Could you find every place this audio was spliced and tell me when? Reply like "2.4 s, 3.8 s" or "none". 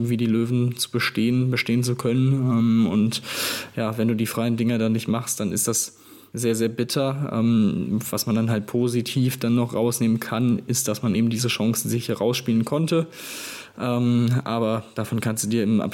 none